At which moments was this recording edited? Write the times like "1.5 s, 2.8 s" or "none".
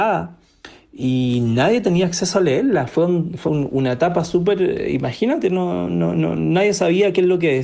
3.5 s